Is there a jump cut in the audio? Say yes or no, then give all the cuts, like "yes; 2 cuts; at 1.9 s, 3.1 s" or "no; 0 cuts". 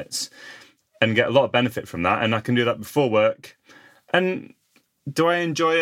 no; 0 cuts